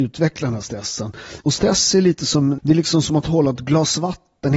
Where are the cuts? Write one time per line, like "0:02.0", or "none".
0:01.4
0:02.6